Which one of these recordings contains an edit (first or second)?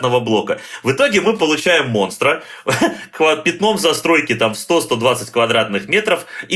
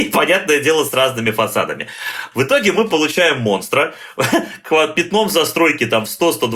second